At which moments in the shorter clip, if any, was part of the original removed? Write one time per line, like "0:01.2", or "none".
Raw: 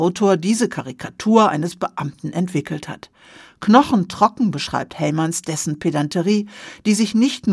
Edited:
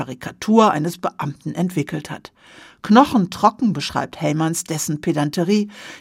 none